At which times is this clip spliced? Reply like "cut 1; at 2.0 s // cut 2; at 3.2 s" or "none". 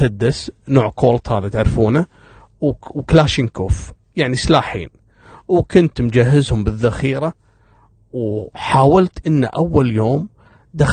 none